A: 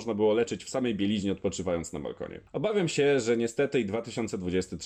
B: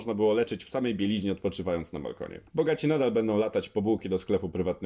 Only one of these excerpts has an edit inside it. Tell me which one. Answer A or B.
B